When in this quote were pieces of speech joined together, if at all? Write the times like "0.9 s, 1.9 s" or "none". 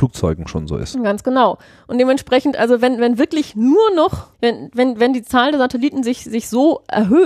4.3 s